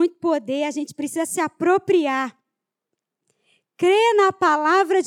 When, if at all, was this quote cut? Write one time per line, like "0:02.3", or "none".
none